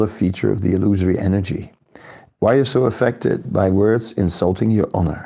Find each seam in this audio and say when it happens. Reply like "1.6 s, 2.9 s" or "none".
2.3 s

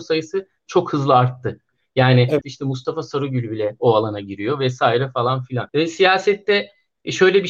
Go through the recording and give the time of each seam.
2.4 s, 5.7 s

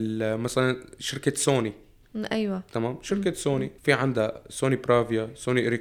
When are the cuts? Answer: 3.8 s

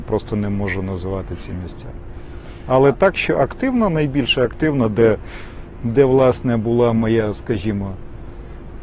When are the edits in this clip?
none

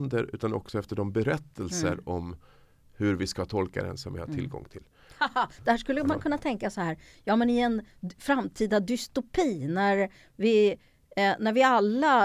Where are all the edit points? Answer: none

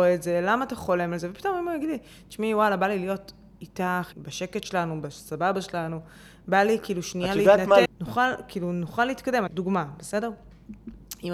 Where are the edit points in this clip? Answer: 4.1 s, 7.8 s, 9.5 s

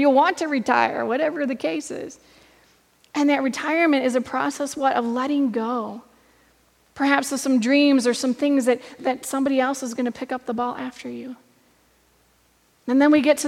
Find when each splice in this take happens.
9.0 s

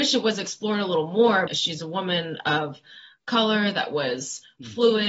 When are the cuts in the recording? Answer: 1.5 s

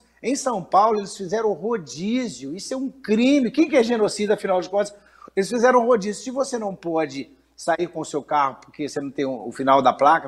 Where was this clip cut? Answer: none

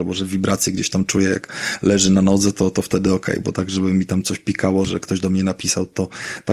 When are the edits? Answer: 4.8 s

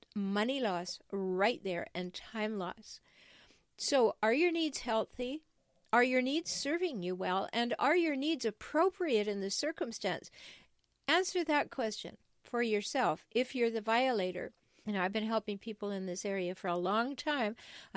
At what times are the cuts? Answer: 14.8 s

